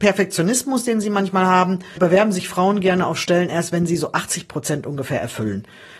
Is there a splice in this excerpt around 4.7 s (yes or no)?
no